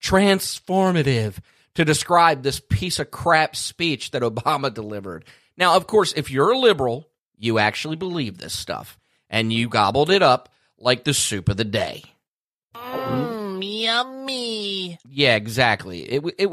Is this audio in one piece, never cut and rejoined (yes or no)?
yes